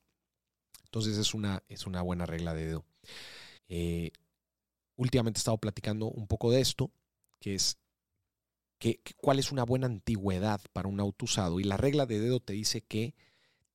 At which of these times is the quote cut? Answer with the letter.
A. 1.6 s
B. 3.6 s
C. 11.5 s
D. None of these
B